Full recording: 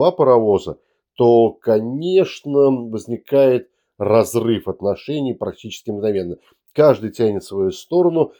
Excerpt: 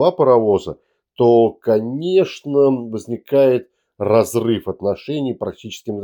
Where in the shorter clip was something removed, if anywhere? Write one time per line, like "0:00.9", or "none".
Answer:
none